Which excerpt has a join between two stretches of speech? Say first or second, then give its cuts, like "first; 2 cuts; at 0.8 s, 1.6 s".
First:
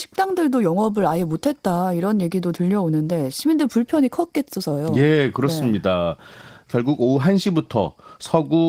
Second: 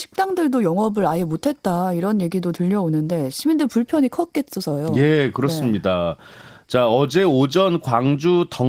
first; 1 cut; at 6.7 s